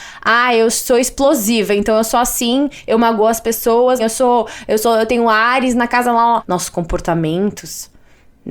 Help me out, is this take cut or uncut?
cut